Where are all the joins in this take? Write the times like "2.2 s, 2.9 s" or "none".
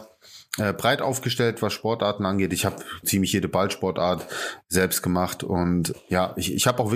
3.0 s

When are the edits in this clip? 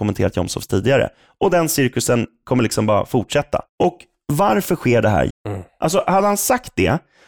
3.7 s, 5.3 s

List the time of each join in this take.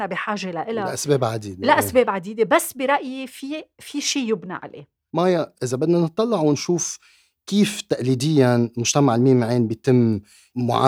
none

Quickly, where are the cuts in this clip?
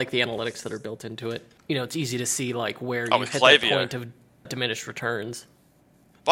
1.6 s, 4.5 s

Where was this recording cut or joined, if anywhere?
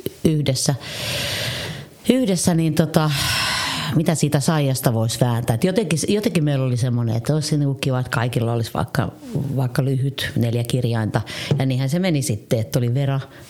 none

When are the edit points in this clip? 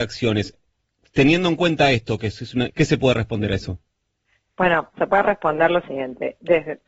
2.7 s

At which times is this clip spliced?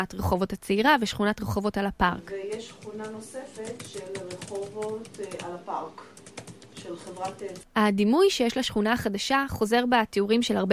7.6 s

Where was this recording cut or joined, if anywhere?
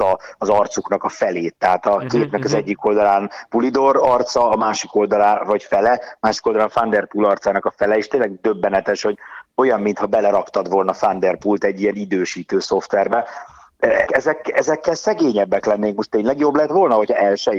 14.1 s

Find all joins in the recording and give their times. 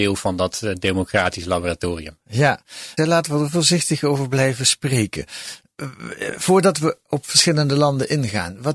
3.0 s

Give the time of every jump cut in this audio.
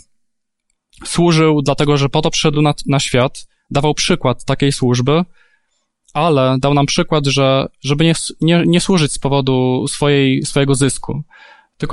none

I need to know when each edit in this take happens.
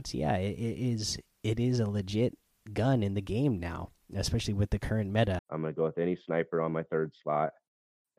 5.4 s

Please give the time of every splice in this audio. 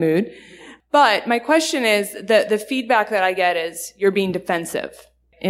none

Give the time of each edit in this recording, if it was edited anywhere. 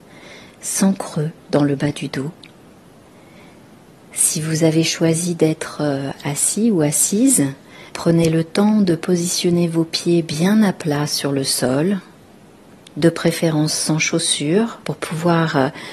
7.9 s, 14.8 s

